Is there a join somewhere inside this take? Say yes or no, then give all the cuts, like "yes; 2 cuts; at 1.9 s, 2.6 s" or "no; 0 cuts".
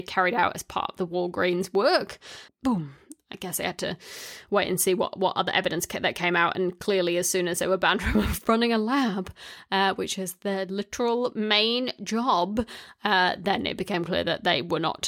yes; 1 cut; at 2.5 s